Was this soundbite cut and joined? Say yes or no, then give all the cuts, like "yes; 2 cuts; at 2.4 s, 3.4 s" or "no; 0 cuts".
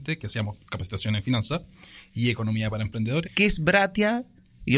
yes; 1 cut; at 3.3 s